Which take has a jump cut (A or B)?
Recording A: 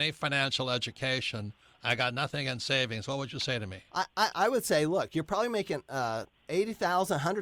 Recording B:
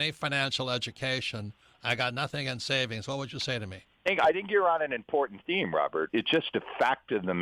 B